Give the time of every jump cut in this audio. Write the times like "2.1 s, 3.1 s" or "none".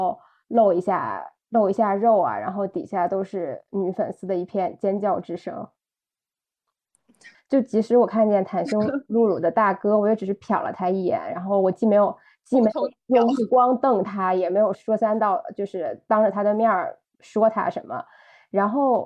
7.3 s, 14.7 s